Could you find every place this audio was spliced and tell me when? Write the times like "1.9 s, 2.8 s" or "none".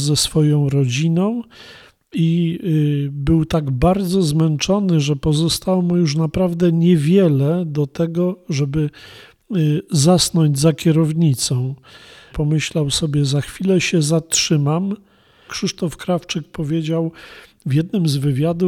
12.3 s, 15.5 s

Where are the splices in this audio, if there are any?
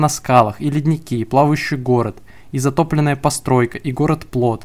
none

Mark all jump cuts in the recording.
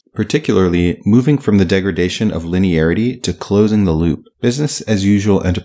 4.3 s

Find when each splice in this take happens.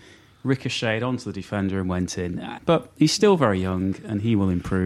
2.6 s

